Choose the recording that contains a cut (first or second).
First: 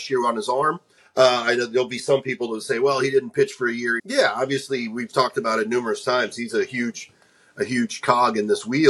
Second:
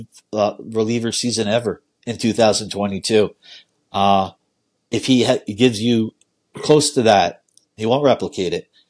first